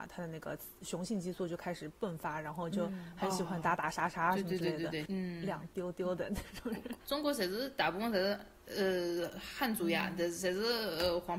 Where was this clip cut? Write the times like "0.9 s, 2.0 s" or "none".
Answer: 5.1 s, 7.0 s